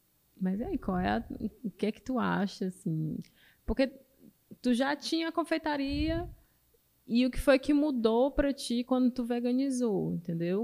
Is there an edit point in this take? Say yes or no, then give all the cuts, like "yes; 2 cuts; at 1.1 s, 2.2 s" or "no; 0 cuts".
no; 0 cuts